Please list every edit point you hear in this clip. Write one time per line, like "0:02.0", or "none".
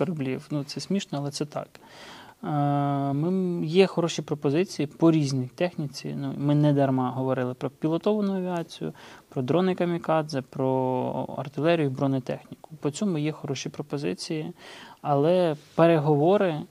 none